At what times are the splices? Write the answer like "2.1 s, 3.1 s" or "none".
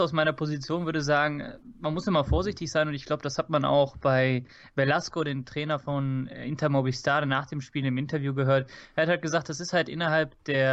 none